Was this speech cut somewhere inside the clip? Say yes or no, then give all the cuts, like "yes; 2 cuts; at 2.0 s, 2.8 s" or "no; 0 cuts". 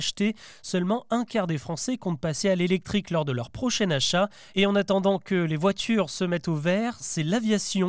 yes; 1 cut; at 4.5 s